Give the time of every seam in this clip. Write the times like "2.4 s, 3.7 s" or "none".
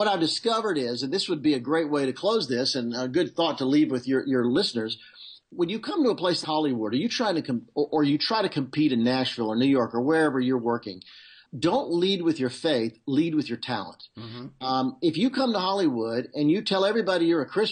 6.4 s